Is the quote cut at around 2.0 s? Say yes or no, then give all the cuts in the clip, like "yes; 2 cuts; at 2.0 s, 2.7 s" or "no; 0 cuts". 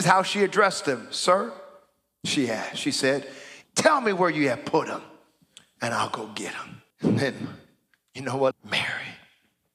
no; 3 cuts; at 3.6 s, 6.9 s, 8.5 s